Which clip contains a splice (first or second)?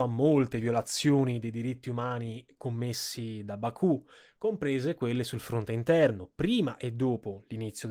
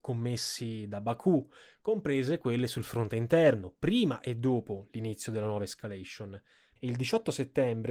second